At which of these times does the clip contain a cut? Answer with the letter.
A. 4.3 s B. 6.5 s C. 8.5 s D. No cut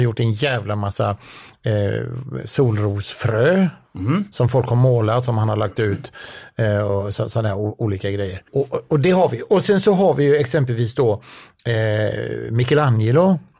C